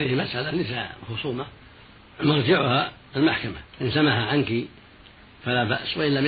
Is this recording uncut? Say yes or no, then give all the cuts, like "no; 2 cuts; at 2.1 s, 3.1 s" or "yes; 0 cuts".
no; 1 cut; at 3.7 s